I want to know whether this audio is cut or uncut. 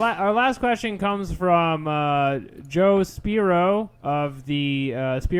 cut